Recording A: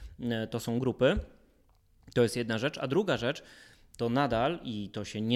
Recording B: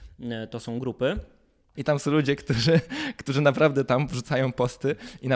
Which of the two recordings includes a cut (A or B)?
B